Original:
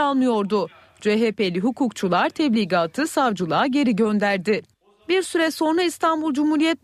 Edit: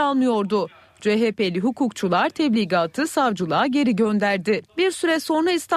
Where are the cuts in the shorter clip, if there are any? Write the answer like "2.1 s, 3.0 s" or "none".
4.7 s